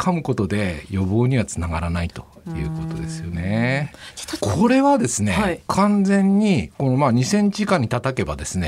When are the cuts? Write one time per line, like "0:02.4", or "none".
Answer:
0:04.4